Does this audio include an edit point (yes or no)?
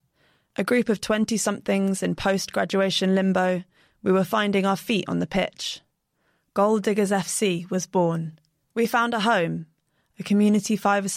yes